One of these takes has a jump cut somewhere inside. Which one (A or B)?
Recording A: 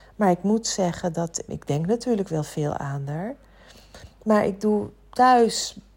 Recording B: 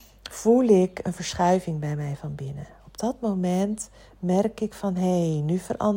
A